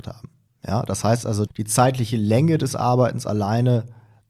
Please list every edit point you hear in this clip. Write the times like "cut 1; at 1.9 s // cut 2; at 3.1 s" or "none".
cut 1; at 1.5 s